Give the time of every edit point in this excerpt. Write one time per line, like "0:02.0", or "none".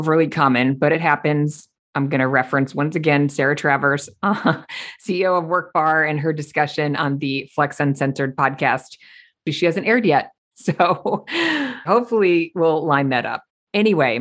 0:10.5
0:11.8

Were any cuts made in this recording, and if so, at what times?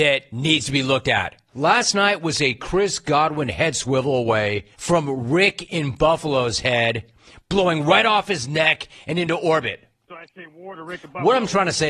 0:01.5
0:04.7

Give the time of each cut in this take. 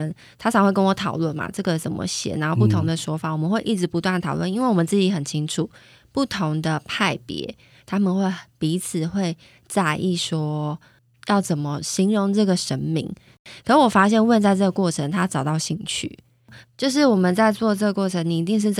0:16.6

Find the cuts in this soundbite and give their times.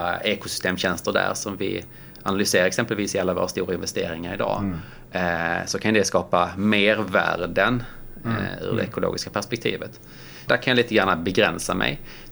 0:10.5

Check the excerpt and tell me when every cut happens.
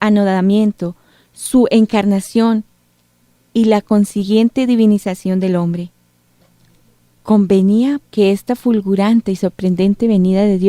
0:08.1

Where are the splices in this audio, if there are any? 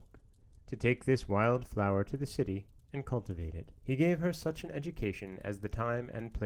0:03.8

